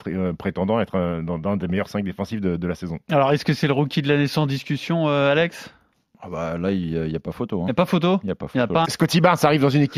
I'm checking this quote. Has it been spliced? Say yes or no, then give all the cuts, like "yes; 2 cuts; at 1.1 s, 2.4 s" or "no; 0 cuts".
yes; 1 cut; at 8.8 s